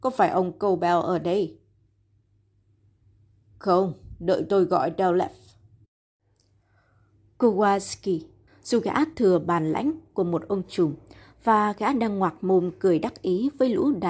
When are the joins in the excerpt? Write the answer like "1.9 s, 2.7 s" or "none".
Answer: 8.5 s